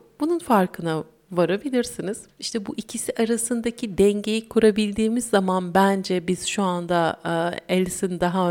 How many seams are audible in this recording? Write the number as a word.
one